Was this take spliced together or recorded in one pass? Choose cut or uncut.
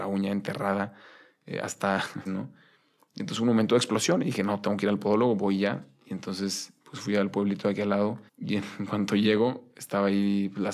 cut